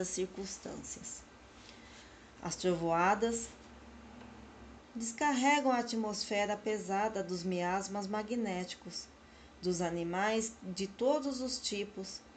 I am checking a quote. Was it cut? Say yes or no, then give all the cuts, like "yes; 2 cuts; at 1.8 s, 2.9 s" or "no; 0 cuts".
yes; 1 cut; at 4.8 s